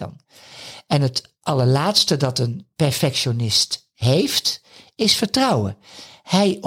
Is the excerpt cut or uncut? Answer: uncut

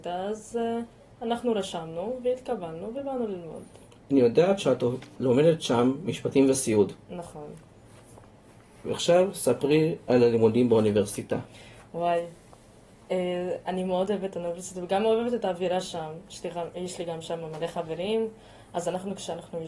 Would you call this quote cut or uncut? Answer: uncut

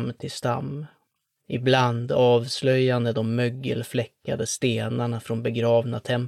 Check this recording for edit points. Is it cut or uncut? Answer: uncut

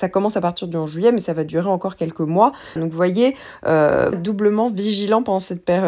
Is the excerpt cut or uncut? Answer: cut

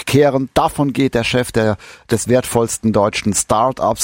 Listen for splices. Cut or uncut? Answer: uncut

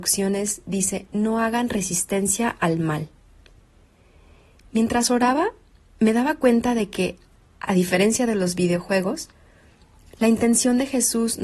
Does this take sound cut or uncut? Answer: uncut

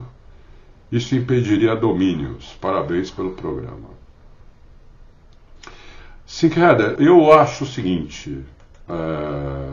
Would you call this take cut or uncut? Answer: cut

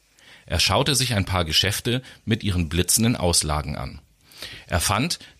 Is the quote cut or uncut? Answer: uncut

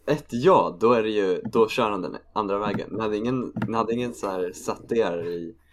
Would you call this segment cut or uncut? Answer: uncut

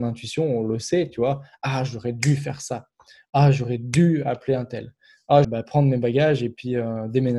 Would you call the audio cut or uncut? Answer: cut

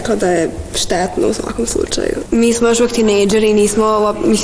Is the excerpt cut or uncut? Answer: cut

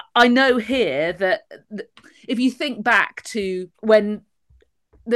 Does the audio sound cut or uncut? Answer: cut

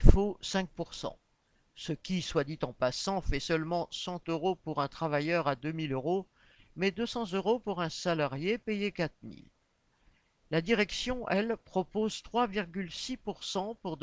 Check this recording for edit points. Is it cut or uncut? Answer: uncut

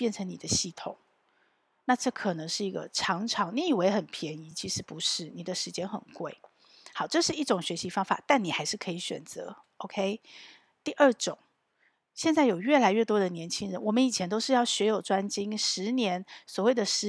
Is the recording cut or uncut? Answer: uncut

